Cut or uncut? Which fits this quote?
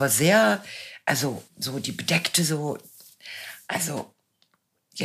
uncut